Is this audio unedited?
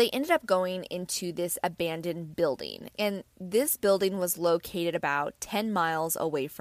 yes; 0 cuts

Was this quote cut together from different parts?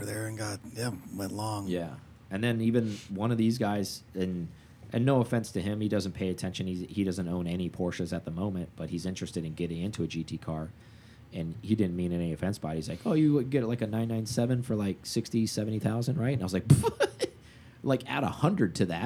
no; 0 cuts

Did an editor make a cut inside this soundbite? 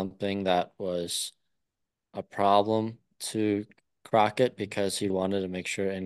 yes; 1 cut; at 5.1 s

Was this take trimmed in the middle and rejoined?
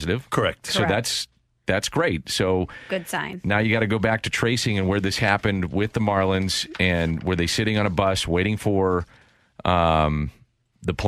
no; 0 cuts

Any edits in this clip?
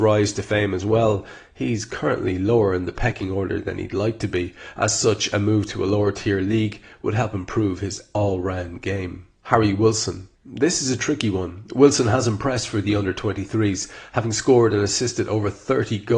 yes; 1 cut; at 10.4 s

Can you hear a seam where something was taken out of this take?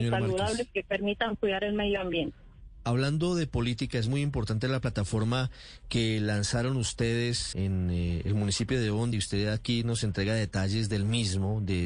yes; 2 cuts; at 7.5 s, 9.1 s

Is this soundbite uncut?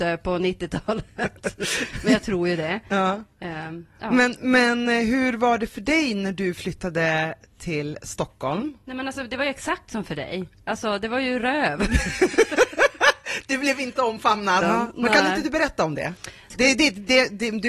no; 2 cuts; at 14.6 s, 16.5 s

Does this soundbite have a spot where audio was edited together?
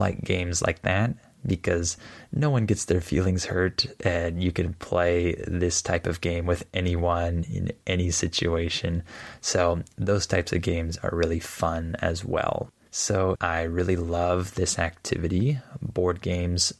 yes; 1 cut; at 13.3 s

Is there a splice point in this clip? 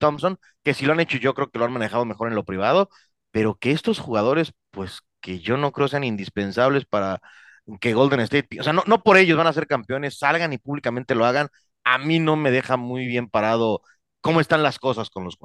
no; 0 cuts

